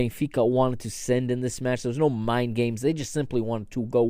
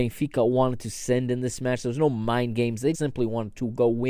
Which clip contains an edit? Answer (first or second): second